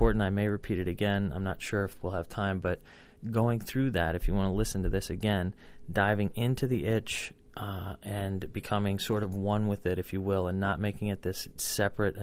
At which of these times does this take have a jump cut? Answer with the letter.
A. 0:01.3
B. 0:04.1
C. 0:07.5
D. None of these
D